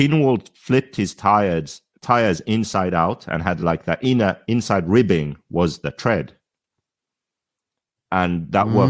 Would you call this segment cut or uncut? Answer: uncut